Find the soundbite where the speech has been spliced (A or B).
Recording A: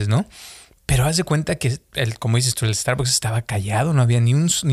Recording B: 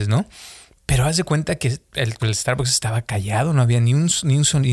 B